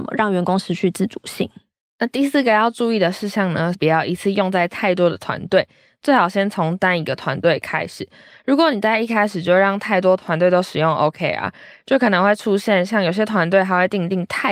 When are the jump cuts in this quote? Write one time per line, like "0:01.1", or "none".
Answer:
0:03.7